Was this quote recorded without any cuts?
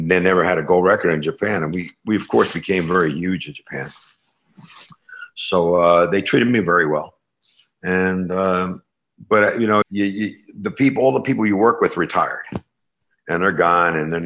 no; 1 cut; at 9.8 s

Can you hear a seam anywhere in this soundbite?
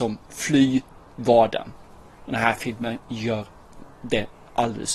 no; 0 cuts

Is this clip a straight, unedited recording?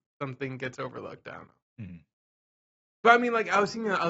yes; 0 cuts

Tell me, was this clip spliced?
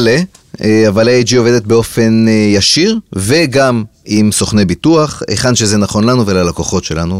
no; 0 cuts

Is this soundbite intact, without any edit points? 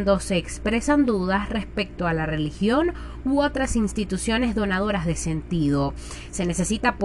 yes; 0 cuts

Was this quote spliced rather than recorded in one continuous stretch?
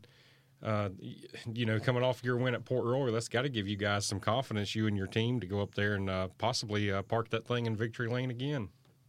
no; 0 cuts

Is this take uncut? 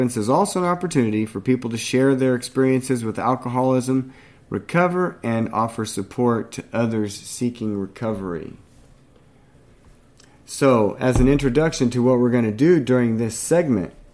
yes; 0 cuts

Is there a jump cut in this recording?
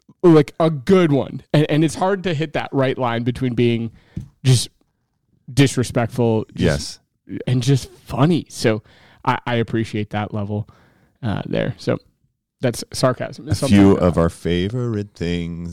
yes; 1 cut; at 7.4 s

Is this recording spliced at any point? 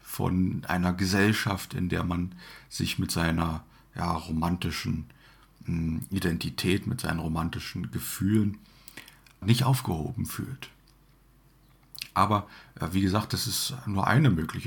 yes; 1 cut; at 9.4 s

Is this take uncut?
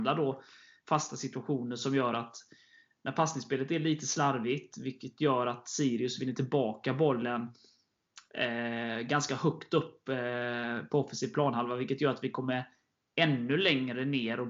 yes; 0 cuts

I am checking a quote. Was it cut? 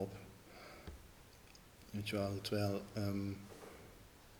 yes; 1 cut; at 1.8 s

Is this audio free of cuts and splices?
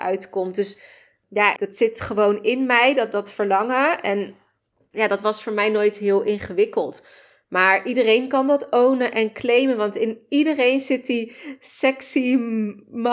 no; 1 cut; at 1.6 s

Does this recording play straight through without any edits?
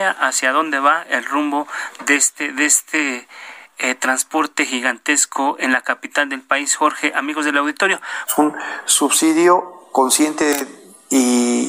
no; 1 cut; at 8.3 s

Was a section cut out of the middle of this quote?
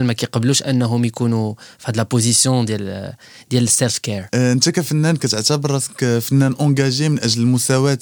no; 0 cuts

